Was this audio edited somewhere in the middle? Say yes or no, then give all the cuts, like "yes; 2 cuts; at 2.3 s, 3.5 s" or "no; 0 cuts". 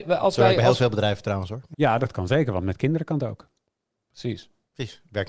yes; 1 cut; at 1.7 s